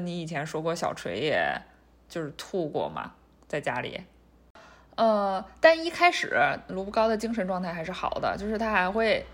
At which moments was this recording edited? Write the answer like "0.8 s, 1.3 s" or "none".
none